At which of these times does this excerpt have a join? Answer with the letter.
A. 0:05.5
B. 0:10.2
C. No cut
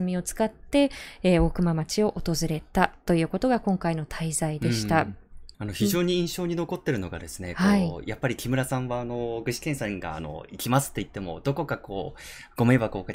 A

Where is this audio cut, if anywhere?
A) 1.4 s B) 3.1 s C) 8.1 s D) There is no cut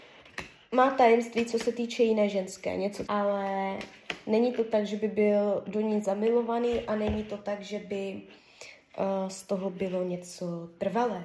B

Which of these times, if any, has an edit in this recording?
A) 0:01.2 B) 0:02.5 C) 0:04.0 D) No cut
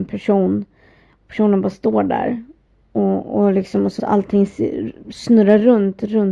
C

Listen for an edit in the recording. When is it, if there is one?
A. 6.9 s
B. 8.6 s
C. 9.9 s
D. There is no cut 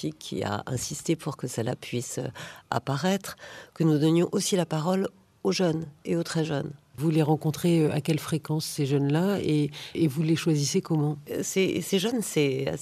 A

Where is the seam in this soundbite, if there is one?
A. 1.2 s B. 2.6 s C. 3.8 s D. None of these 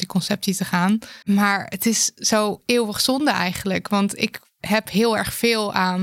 A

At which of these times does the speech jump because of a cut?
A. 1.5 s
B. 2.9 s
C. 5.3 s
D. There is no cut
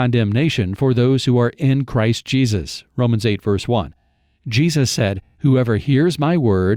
C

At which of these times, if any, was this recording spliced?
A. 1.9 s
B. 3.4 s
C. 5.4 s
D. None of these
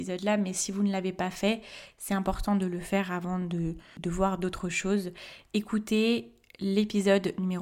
D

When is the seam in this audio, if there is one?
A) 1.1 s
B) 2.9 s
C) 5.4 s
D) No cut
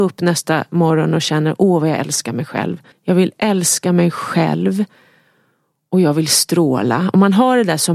B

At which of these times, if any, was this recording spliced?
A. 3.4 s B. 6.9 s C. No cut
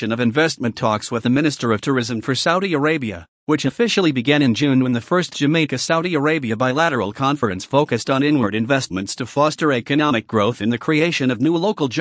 A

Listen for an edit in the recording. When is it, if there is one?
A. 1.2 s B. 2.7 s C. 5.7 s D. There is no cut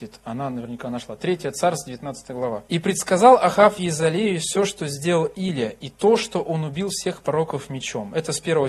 B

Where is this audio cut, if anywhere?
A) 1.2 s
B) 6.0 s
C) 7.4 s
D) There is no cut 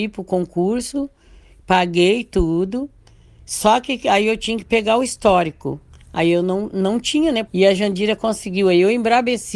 C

